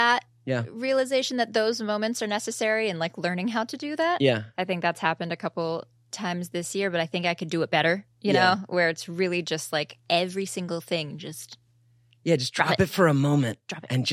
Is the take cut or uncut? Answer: uncut